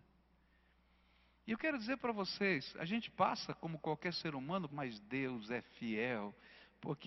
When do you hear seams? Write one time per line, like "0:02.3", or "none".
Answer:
0:04.7